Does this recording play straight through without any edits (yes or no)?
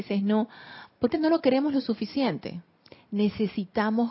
no